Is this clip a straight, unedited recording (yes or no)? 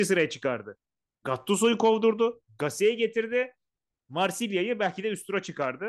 yes